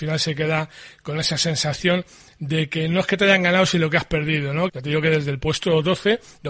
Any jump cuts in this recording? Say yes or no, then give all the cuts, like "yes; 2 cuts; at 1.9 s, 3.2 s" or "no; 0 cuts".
yes; 1 cut; at 4.7 s